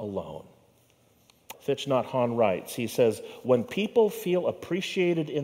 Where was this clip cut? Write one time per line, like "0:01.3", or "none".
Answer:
0:01.5

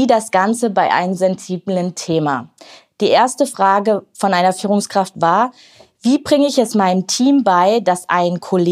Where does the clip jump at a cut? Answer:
0:01.2

